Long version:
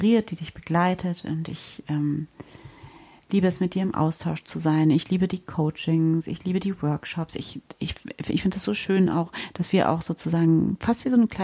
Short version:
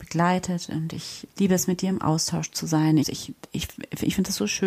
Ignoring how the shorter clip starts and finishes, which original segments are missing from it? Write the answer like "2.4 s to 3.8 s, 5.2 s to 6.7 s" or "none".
1.8 s to 3.2 s, 4.9 s to 7.3 s